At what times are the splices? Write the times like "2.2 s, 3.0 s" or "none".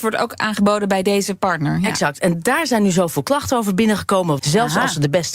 4.4 s